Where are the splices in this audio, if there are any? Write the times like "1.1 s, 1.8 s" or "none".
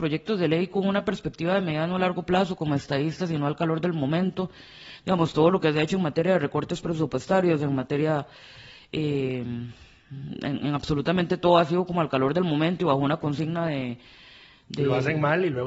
none

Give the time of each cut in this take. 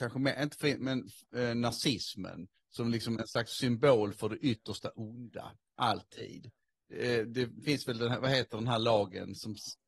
none

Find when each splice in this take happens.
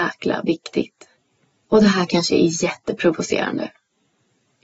1.6 s

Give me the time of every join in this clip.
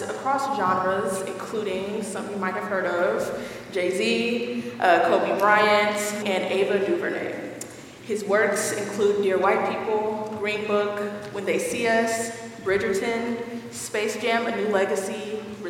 6.2 s

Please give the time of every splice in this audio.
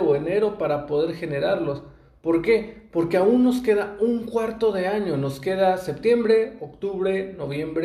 none

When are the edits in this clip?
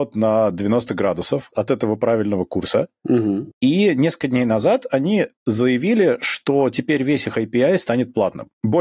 1.5 s

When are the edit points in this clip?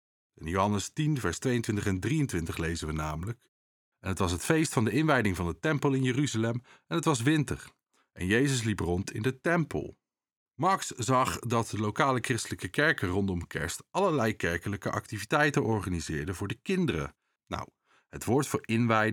10.4 s, 17.4 s

